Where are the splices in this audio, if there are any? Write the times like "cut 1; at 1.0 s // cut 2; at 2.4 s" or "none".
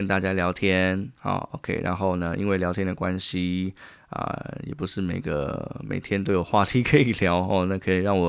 none